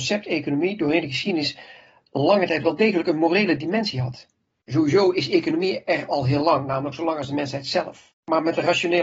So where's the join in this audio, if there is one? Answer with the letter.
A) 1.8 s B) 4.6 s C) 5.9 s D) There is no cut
D